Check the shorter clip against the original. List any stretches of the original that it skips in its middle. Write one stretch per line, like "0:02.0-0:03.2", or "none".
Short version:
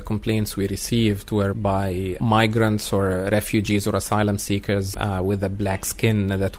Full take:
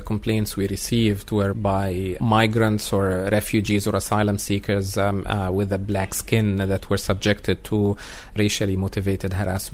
0:04.9-0:05.2